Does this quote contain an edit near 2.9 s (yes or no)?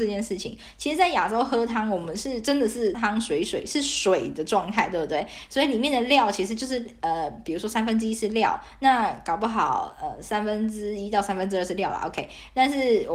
yes